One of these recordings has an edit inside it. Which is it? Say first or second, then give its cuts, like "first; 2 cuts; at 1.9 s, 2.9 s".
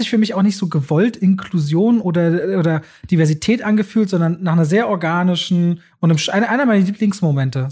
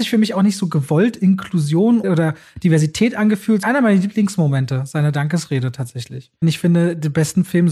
second; 3 cuts; at 2.0 s, 3.6 s, 6.4 s